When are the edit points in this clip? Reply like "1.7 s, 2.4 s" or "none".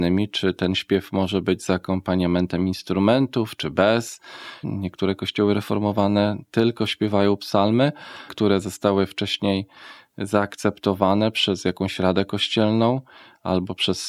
4.6 s, 8.3 s